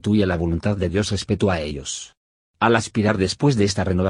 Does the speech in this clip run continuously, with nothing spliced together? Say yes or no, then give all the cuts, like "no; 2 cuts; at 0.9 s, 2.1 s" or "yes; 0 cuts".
yes; 0 cuts